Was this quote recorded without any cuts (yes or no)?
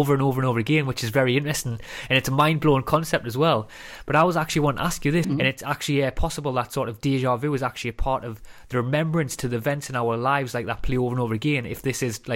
no